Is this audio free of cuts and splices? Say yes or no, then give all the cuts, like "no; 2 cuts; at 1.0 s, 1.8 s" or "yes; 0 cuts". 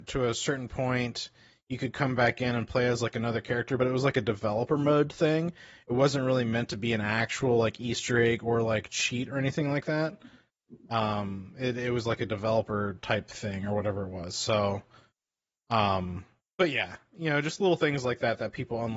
yes; 0 cuts